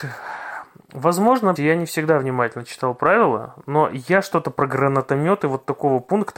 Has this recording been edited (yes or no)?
yes